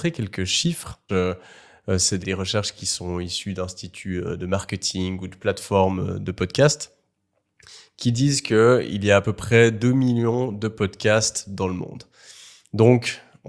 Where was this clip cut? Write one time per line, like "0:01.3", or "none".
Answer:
0:01.1
0:02.2